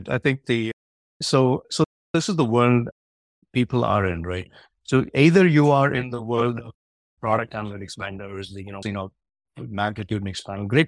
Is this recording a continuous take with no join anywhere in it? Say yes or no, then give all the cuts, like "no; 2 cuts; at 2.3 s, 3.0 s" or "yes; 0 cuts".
no; 1 cut; at 8.8 s